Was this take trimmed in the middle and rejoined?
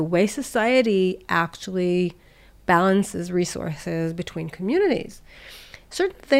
no; 0 cuts

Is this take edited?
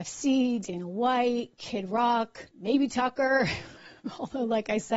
yes; 1 cut; at 2.5 s

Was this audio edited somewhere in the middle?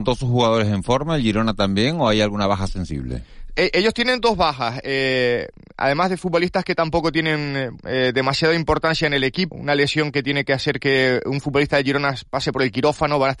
yes; 2 cuts; at 7.8 s, 9.5 s

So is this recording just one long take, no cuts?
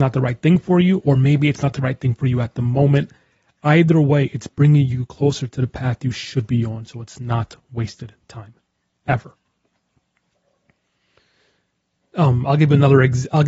yes; 0 cuts

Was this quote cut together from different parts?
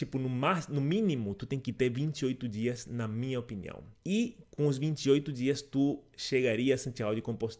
yes; 1 cut; at 3.9 s

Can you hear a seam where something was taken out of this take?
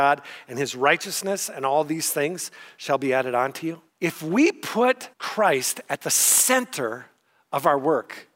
yes; 2 cuts; at 3.9 s, 5.1 s

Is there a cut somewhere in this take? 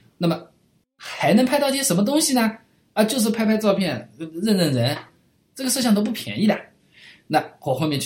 no; 0 cuts

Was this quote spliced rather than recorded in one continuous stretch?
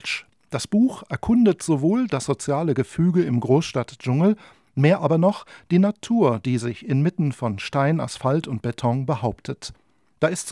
no; 0 cuts

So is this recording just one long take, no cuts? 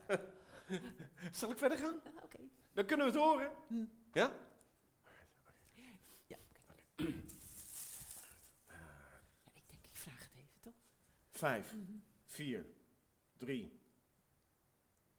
yes; 0 cuts

